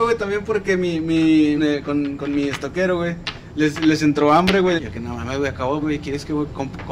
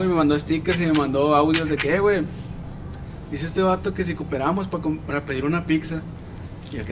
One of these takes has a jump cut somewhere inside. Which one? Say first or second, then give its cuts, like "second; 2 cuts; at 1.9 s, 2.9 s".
first; 3 cuts; at 1.6 s, 4.8 s, 5.8 s